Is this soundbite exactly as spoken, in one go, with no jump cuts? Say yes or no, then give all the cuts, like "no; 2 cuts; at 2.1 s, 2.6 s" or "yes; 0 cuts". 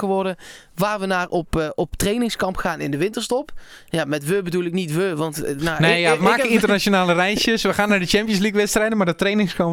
no; 1 cut; at 6.2 s